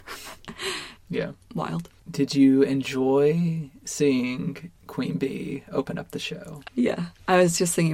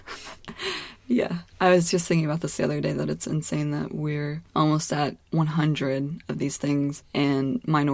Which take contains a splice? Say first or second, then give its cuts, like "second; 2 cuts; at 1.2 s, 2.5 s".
first; 2 cuts; at 1.0 s, 6.6 s